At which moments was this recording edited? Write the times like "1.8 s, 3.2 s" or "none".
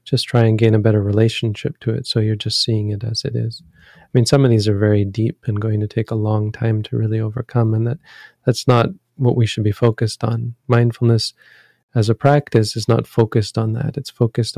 none